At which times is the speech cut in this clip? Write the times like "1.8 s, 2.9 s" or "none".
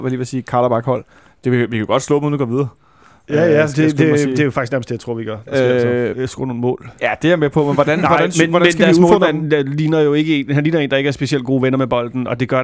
6.1 s